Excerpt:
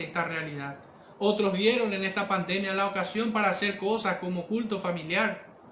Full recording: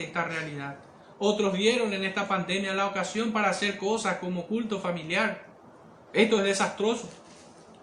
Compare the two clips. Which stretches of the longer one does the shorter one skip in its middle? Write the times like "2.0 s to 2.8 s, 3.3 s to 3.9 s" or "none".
none